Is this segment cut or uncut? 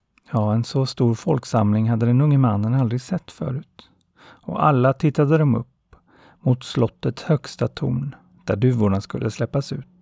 uncut